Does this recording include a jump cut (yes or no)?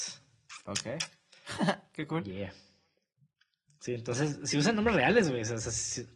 no